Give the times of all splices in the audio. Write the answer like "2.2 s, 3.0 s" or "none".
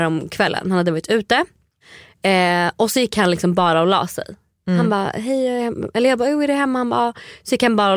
none